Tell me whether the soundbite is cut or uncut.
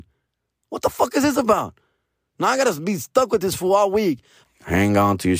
cut